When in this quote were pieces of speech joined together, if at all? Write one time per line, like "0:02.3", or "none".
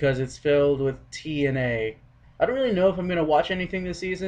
0:02.2